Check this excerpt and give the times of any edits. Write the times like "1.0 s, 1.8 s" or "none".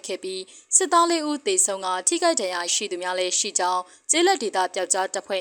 2.7 s